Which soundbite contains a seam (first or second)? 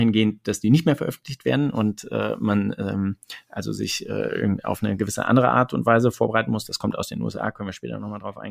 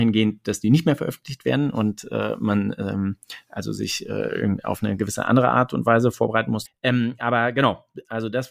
second